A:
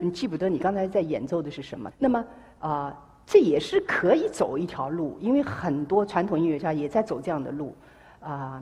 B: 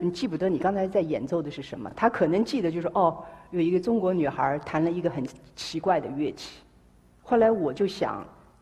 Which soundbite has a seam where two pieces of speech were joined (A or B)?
A